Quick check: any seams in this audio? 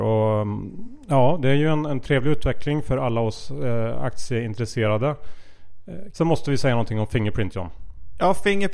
yes; 1 cut; at 6.1 s

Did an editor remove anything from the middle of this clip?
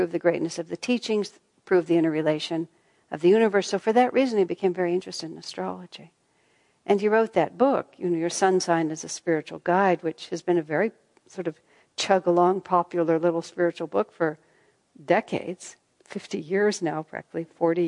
no; 0 cuts

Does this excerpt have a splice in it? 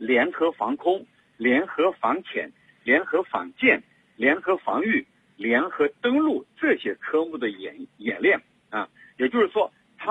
no; 0 cuts

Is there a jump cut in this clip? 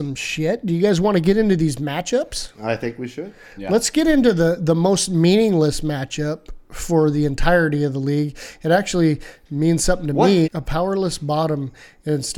yes; 1 cut; at 10.4 s

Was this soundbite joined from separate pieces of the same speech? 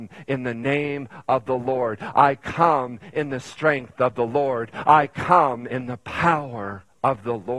no; 0 cuts

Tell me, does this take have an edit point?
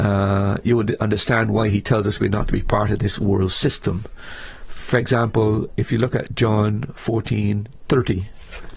no; 0 cuts

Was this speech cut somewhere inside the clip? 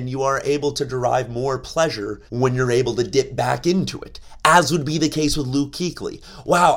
yes; 1 cut; at 2.3 s

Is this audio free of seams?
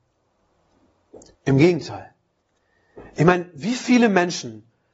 no; 1 cut; at 1.4 s

